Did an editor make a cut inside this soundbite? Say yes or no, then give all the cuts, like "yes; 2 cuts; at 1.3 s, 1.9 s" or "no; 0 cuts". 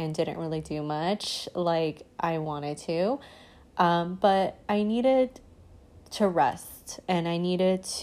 no; 0 cuts